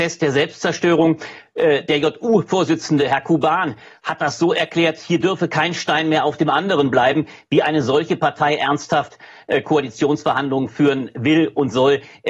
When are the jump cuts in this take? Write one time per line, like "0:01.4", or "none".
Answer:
none